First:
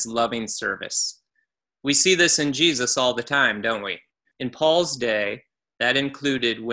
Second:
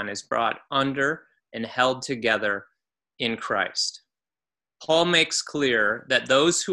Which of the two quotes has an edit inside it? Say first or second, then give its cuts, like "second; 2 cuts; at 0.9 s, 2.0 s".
first; 1 cut; at 4.3 s